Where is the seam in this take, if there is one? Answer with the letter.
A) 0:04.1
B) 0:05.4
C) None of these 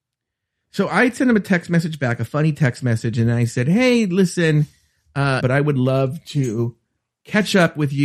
B